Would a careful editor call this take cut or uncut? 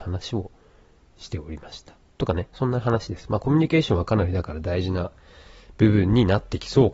uncut